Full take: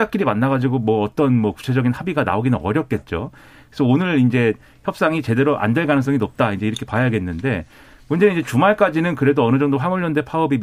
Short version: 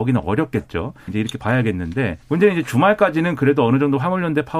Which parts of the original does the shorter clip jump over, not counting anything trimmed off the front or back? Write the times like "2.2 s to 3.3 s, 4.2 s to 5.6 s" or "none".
3.5 s to 6.5 s, 7.7 s to 8.0 s